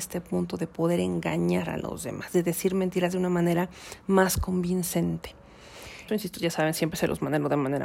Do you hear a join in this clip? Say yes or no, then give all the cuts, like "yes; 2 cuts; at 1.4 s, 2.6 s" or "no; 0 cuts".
yes; 1 cut; at 6.1 s